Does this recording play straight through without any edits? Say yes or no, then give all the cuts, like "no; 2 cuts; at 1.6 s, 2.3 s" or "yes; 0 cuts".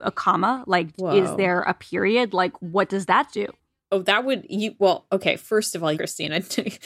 no; 1 cut; at 5.9 s